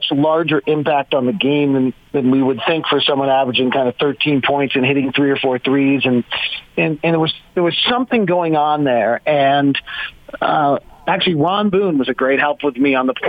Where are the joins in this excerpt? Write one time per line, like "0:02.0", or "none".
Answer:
none